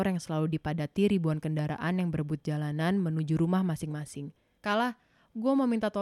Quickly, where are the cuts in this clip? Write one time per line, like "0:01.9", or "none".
0:04.6